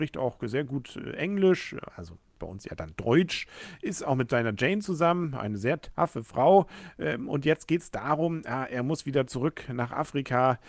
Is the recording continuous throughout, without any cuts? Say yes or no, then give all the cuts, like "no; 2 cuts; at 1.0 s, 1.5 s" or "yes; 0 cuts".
yes; 0 cuts